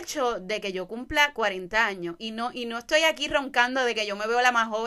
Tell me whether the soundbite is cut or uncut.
uncut